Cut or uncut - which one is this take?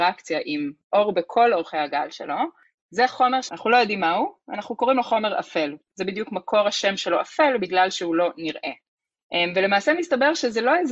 uncut